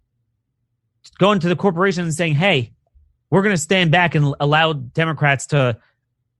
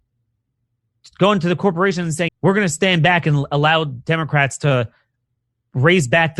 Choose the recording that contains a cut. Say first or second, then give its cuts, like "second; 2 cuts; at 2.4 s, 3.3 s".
second; 1 cut; at 2.3 s